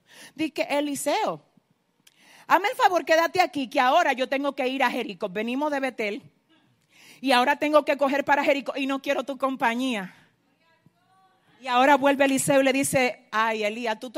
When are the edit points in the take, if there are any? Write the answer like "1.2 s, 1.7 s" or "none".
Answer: none